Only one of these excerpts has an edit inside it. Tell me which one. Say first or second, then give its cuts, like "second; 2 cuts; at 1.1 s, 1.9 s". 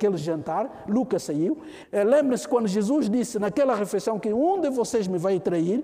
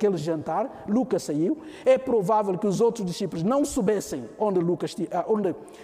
first; 1 cut; at 1.8 s